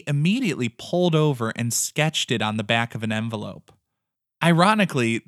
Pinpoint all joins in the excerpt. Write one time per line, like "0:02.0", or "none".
none